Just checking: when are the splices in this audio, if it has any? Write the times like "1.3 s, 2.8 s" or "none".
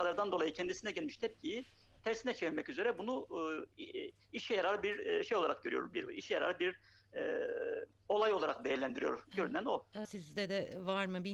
10.0 s